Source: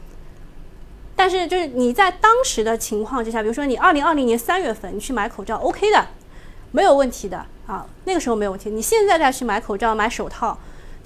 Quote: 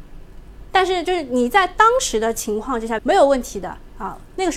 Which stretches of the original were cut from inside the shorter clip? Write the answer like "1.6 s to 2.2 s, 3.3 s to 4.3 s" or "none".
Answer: 3.4 s to 6.7 s